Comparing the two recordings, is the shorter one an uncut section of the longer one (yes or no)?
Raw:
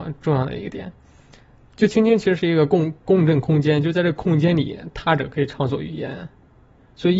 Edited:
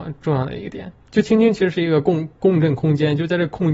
no